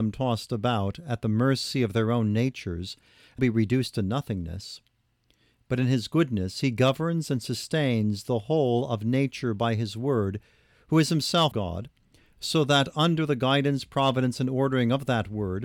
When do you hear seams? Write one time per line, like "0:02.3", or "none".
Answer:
0:03.4
0:11.5